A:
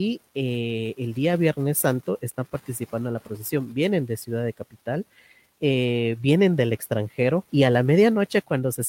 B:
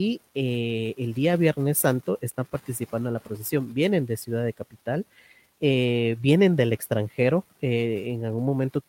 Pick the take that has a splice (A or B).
A